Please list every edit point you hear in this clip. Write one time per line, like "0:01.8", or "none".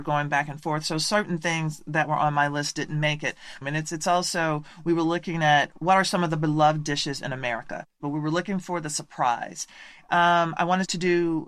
0:03.6